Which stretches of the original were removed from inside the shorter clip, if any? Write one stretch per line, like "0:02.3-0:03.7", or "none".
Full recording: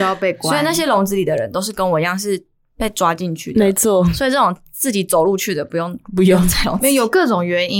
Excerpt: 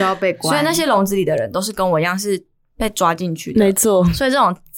none